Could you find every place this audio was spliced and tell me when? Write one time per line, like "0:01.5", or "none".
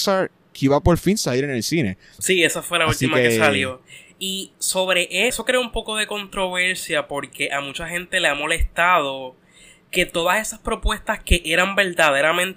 0:02.2
0:05.3